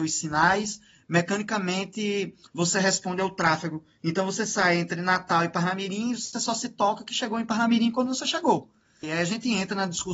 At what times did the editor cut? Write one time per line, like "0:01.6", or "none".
0:09.0